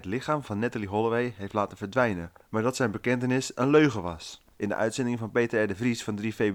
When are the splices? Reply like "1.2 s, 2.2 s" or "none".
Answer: 4.5 s